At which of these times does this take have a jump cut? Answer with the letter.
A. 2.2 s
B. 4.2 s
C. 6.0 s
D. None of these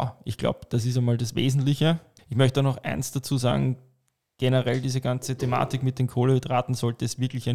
A